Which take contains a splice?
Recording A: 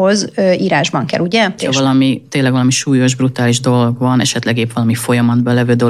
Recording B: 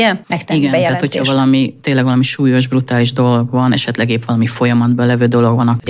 A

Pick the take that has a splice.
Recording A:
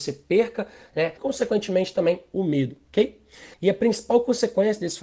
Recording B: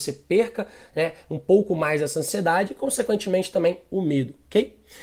A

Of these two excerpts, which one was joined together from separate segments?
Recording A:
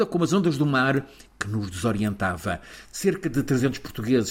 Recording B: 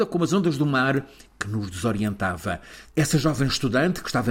B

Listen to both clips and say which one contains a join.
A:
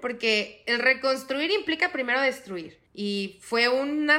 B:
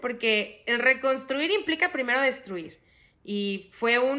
A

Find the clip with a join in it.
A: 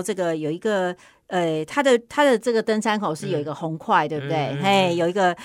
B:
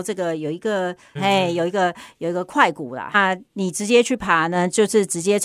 B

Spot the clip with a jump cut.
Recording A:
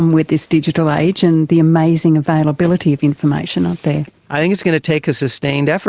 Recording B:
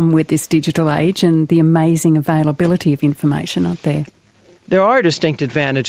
A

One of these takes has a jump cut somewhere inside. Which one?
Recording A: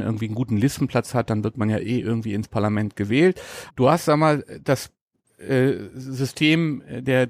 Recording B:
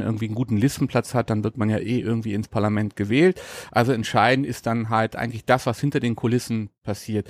A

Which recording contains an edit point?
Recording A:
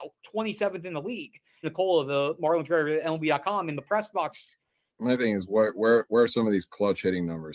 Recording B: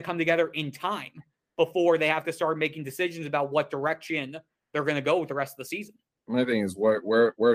A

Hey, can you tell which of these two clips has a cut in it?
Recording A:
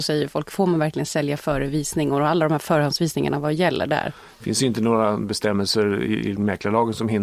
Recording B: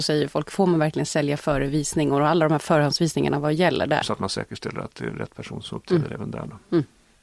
B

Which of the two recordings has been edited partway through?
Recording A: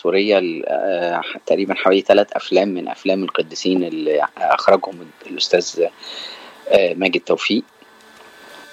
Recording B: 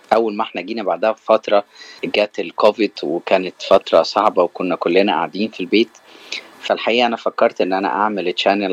B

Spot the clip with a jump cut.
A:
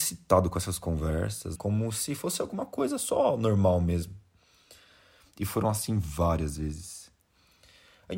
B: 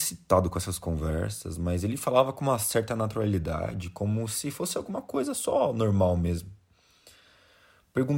A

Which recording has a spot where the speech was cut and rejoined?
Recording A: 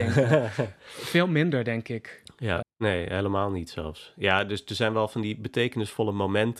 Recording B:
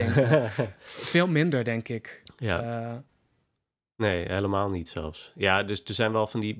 A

